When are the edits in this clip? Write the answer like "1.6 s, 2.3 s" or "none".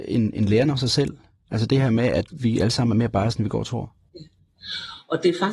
2.3 s